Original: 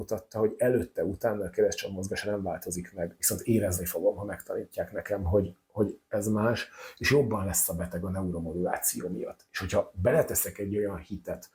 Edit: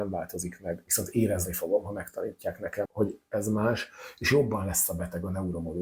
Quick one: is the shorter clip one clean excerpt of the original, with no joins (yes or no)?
no